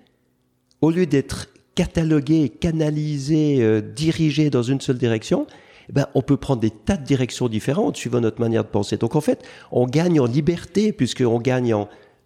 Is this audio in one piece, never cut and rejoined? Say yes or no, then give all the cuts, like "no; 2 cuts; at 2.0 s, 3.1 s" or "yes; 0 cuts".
yes; 0 cuts